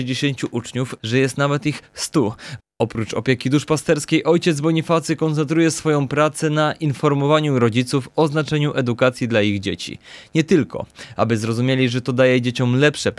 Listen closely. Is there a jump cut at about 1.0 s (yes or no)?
yes